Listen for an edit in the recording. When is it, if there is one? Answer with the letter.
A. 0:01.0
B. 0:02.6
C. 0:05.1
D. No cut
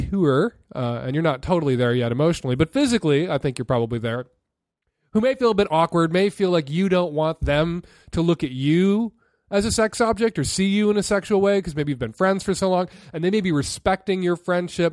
D